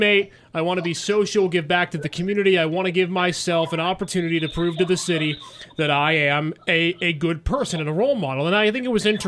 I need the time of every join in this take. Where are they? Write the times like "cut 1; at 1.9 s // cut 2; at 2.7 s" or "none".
none